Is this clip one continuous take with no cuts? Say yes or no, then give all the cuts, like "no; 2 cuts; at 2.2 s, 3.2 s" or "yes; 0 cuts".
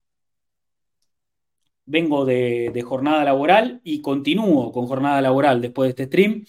yes; 0 cuts